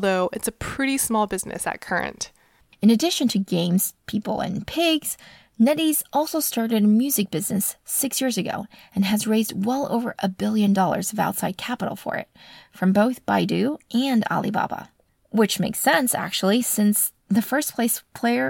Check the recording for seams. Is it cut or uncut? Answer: uncut